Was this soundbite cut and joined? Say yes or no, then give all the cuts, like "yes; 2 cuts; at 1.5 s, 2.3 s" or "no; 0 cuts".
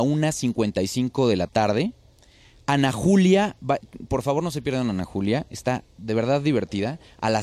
no; 0 cuts